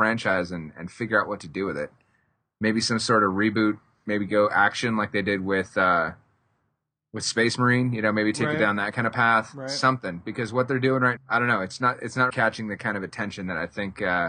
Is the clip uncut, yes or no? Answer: no